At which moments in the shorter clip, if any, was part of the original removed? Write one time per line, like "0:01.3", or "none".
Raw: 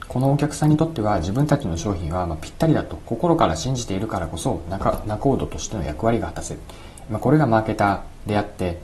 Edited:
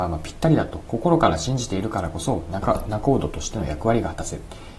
none